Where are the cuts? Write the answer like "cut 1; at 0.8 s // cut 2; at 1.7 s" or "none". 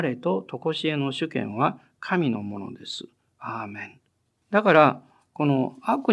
cut 1; at 4.4 s